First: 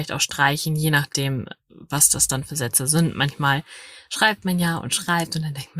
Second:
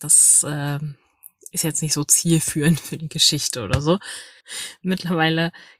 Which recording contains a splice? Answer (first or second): second